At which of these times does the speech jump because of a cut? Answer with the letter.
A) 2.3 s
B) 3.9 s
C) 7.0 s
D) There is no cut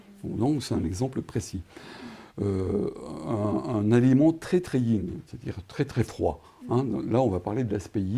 D